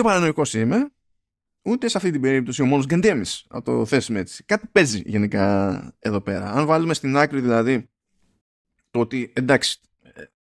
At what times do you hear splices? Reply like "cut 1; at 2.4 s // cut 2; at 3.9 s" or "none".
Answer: none